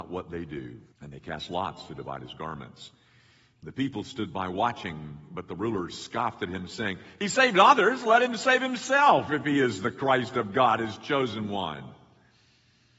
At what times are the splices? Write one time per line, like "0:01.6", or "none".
0:00.9